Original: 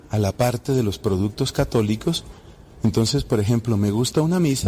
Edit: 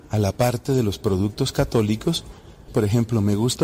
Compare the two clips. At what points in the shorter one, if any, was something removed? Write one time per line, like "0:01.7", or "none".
0:02.7